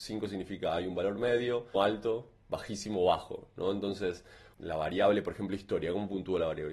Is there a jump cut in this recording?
yes; 2 cuts; at 1.7 s, 4.5 s

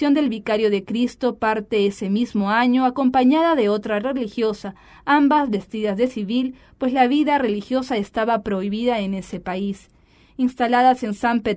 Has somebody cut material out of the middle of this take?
no; 0 cuts

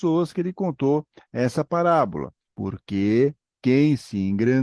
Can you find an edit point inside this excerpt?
yes; 1 cut; at 2.5 s

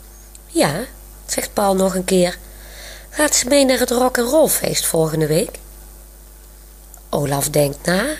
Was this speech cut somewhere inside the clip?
yes; 1 cut; at 1.2 s

